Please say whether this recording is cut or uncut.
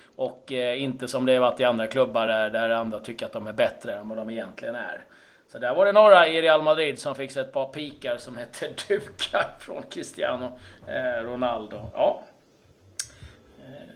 uncut